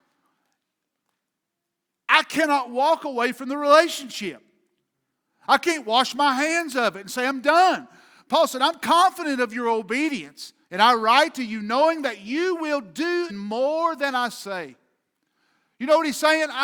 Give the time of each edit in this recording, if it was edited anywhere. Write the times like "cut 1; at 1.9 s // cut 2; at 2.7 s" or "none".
cut 1; at 8.3 s // cut 2; at 10.6 s // cut 3; at 13.3 s